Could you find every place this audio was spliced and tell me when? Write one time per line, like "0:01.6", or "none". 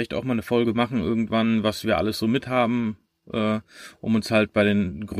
none